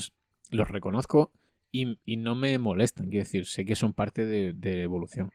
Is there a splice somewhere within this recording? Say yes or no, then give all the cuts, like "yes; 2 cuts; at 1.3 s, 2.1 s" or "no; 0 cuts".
no; 0 cuts